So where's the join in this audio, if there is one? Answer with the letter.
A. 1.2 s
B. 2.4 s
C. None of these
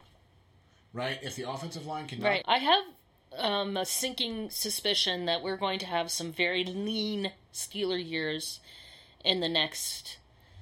B